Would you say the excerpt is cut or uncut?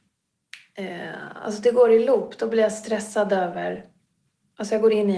uncut